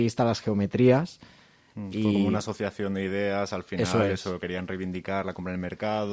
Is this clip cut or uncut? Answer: uncut